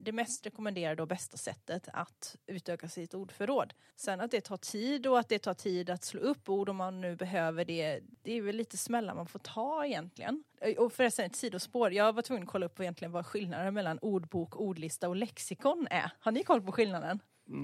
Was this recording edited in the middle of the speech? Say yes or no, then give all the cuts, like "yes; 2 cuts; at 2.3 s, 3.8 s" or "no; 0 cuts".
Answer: no; 0 cuts